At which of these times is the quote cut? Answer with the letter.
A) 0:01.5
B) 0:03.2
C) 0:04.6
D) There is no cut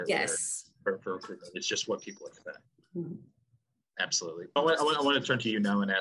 C